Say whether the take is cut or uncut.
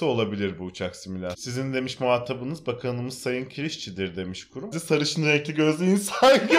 cut